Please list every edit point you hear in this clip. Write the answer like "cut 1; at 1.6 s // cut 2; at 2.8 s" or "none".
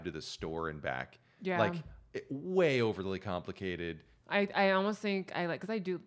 cut 1; at 4.2 s